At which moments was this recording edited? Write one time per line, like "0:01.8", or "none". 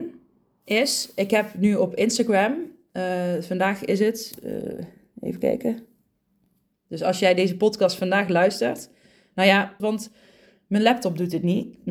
0:06.7
0:09.8